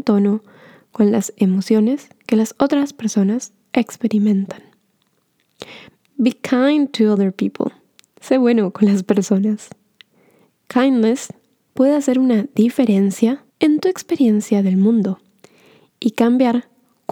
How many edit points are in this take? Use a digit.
2